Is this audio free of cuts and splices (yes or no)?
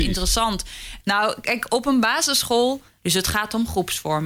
no